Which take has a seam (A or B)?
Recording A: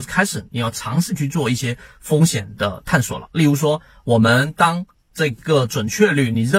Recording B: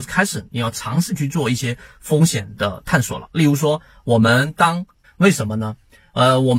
B